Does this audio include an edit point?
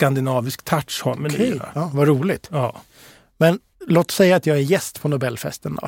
no; 0 cuts

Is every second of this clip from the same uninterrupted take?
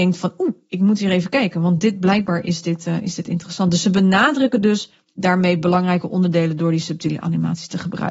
yes; 0 cuts

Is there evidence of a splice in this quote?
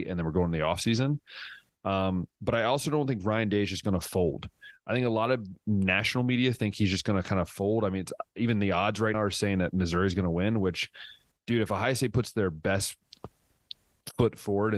yes; 1 cut; at 9.1 s

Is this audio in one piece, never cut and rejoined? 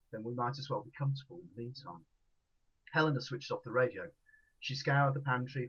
yes; 0 cuts

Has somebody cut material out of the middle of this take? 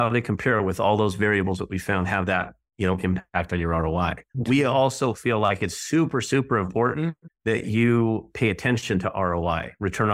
no; 0 cuts

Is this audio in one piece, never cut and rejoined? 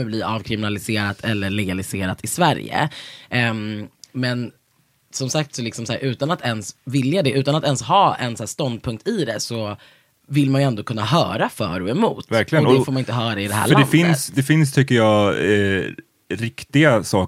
yes; 0 cuts

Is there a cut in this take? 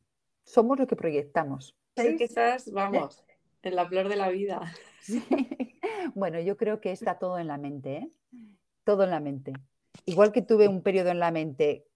yes; 1 cut; at 2.0 s

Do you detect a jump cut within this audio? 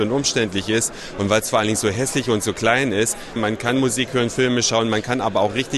yes; 1 cut; at 3.4 s

